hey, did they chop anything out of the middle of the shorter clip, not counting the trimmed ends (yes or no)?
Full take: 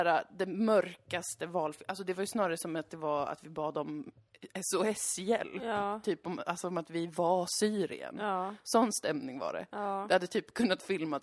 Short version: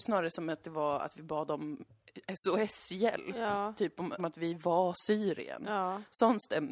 yes